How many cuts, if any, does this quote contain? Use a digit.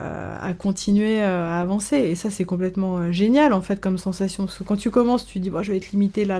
0